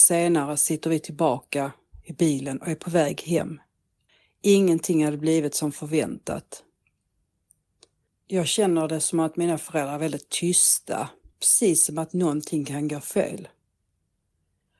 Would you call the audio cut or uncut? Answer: cut